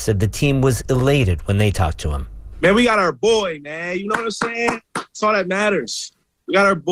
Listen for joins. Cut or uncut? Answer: uncut